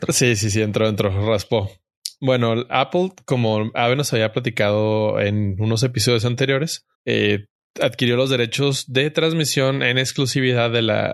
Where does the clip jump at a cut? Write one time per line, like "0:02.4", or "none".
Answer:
0:06.9